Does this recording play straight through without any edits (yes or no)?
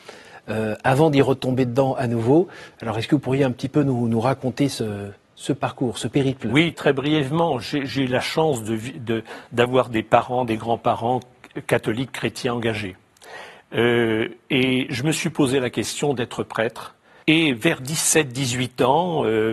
no